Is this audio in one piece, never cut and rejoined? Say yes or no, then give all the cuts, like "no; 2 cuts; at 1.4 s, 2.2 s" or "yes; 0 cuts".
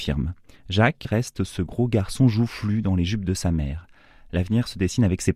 no; 1 cut; at 1.0 s